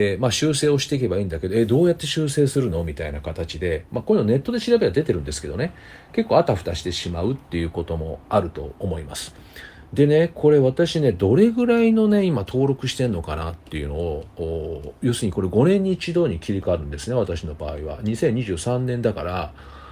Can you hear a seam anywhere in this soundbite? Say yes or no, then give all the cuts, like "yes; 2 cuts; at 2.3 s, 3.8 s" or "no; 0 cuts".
no; 0 cuts